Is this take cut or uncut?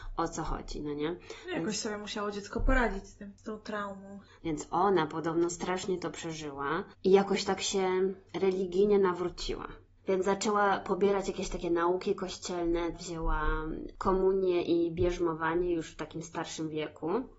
cut